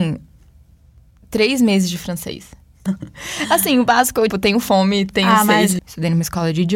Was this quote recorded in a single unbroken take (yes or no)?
no